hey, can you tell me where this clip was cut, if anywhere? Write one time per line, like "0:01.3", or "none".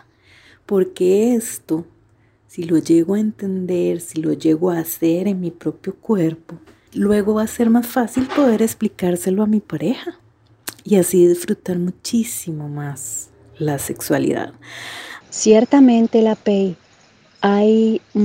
0:06.9
0:15.2